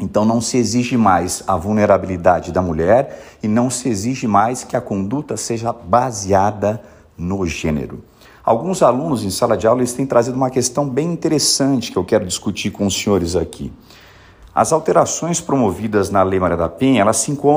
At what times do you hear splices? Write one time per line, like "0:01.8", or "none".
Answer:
none